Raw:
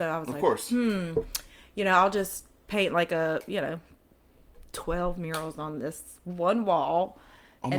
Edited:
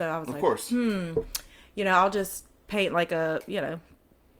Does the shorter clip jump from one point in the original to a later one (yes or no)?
no